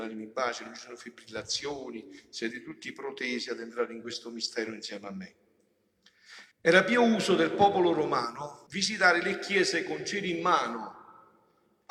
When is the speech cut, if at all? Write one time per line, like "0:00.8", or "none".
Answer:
0:06.5
0:08.7